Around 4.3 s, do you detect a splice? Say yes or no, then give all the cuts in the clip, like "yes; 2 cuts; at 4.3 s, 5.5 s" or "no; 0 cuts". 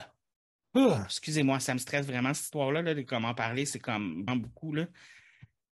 yes; 1 cut; at 4.3 s